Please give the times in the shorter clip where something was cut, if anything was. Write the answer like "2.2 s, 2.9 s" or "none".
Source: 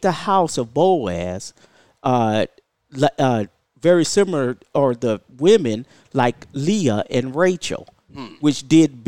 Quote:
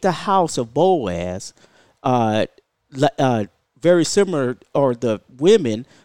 none